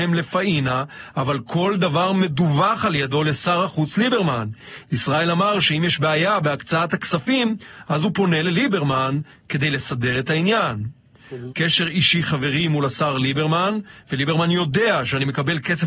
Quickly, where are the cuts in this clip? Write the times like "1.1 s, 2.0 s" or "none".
11.5 s

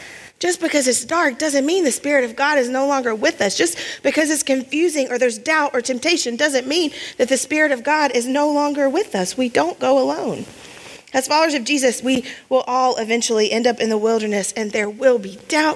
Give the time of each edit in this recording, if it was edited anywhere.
none

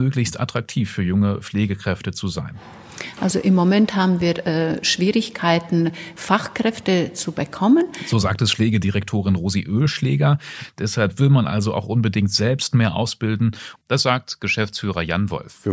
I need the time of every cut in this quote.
13.8 s

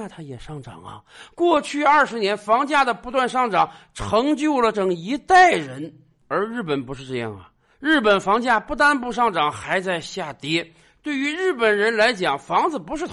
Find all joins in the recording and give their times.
4.7 s

